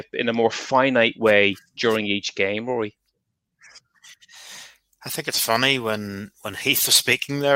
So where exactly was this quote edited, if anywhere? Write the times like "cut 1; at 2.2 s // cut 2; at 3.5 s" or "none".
none